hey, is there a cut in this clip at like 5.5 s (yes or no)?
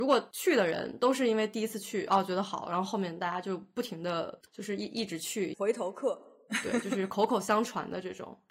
yes